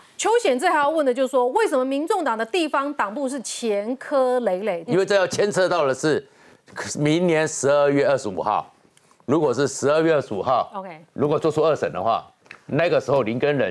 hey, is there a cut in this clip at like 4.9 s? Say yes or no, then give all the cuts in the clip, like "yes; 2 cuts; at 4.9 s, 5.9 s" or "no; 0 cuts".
yes; 1 cut; at 4.9 s